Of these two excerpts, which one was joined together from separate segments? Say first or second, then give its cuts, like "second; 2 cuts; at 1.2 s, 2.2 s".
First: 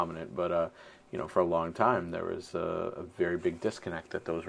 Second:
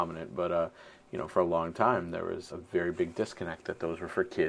second; 1 cut; at 2.5 s